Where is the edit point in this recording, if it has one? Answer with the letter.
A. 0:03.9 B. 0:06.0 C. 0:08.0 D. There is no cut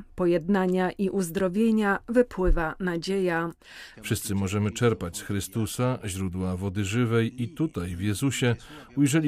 A